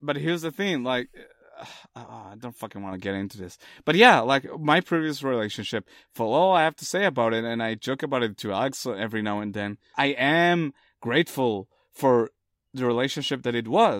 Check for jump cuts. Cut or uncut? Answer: cut